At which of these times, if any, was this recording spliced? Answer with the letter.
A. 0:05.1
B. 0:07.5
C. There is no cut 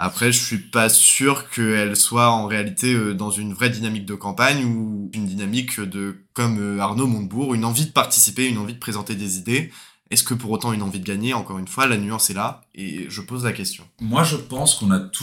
A